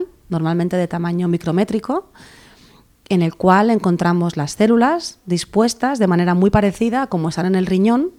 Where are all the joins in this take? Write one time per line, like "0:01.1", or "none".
none